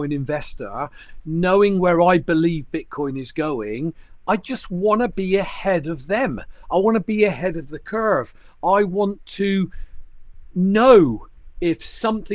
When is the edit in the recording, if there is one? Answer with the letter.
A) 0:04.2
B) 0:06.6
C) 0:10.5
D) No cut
C